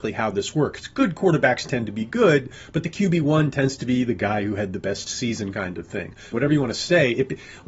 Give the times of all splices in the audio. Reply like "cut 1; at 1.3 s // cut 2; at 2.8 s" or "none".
cut 1; at 6.3 s